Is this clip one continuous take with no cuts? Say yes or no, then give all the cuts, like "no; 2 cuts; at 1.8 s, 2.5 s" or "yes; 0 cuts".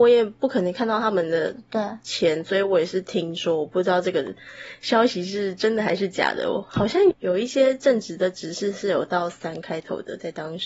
no; 1 cut; at 7.1 s